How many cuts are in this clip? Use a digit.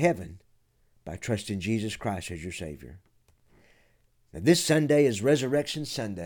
0